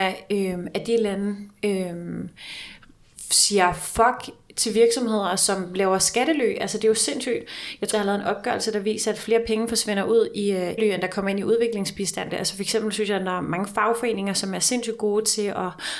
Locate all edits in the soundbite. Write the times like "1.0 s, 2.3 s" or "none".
7.9 s, 10.8 s, 12.3 s